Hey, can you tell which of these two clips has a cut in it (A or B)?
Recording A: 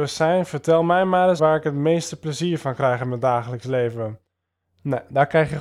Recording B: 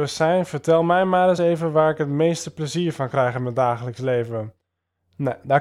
A